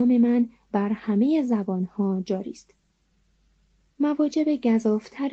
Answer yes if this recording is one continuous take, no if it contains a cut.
no